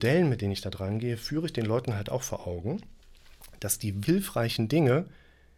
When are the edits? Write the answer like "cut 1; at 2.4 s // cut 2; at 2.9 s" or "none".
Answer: cut 1; at 4.0 s